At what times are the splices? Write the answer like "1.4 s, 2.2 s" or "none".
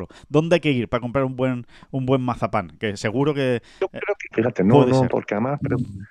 4.3 s